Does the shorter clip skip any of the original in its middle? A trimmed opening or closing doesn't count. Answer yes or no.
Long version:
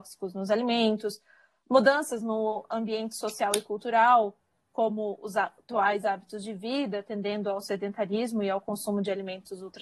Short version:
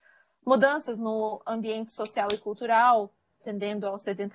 yes